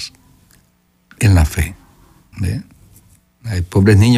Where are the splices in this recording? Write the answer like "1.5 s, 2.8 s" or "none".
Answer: 2.3 s

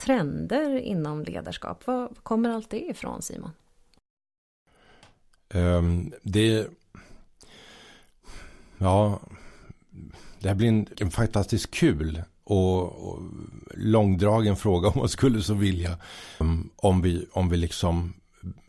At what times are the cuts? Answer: 10.9 s, 16.4 s

